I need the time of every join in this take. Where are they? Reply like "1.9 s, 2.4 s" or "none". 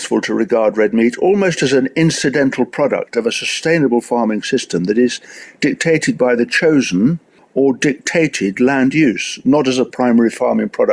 none